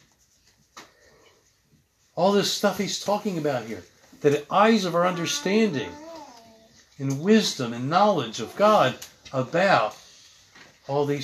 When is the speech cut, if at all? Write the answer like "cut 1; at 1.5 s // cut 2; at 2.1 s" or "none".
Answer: none